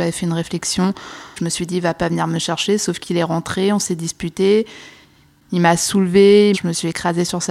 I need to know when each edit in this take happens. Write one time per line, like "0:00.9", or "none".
0:06.5